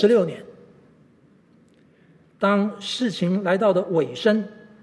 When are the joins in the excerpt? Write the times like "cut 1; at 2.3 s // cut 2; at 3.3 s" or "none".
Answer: cut 1; at 2.3 s